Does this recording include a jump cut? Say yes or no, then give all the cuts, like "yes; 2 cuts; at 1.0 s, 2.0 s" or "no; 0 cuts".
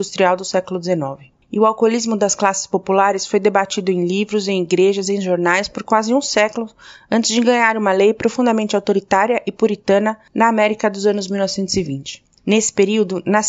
no; 0 cuts